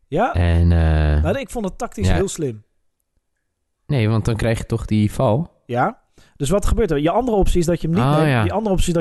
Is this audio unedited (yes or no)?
yes